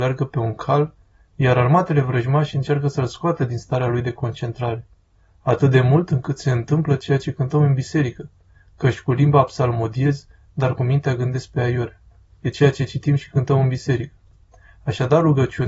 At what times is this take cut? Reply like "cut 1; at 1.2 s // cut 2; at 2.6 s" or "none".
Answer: none